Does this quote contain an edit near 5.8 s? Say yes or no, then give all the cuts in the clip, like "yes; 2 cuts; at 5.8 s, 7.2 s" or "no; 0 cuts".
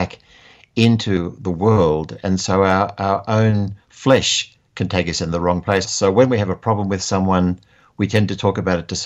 yes; 1 cut; at 5.8 s